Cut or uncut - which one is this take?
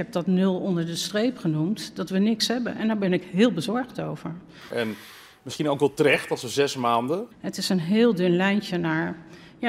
cut